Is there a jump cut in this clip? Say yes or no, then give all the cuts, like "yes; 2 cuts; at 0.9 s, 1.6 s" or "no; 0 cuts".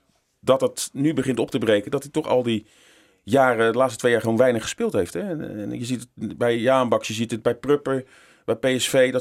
no; 0 cuts